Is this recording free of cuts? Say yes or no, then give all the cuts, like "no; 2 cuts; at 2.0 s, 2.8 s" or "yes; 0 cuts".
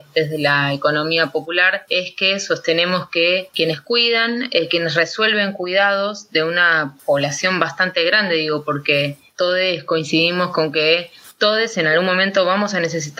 yes; 0 cuts